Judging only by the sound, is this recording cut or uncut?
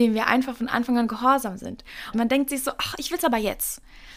cut